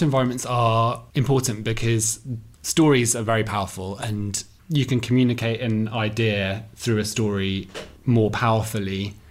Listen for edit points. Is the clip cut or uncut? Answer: cut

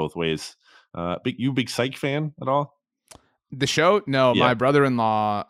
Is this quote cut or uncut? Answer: uncut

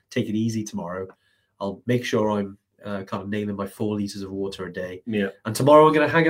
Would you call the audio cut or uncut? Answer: uncut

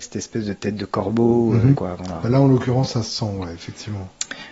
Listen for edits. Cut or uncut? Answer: cut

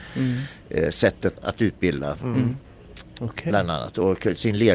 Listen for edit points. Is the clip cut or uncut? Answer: cut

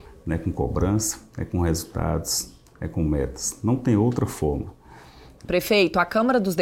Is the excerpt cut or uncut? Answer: cut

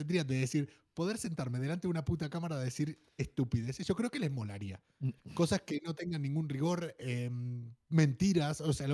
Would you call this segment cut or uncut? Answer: uncut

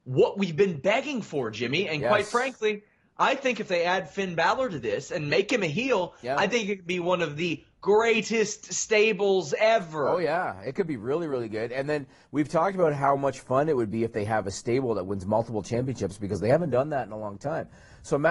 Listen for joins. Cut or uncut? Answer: uncut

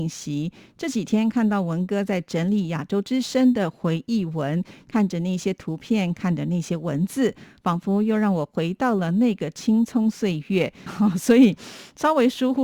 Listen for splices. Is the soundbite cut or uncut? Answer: cut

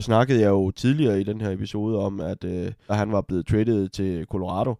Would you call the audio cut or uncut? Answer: cut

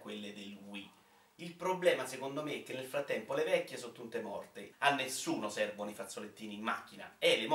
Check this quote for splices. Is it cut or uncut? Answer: cut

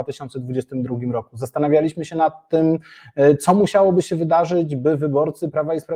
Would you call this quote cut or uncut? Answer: uncut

